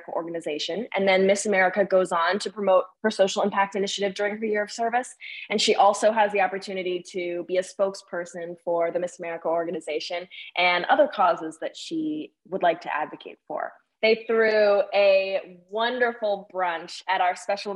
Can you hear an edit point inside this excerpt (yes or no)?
yes